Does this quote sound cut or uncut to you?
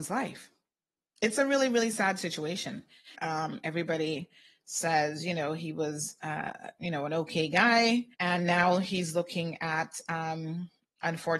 cut